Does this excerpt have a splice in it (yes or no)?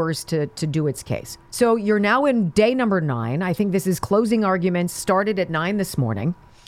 yes